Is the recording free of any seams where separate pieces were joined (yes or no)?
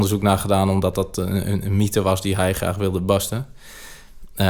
yes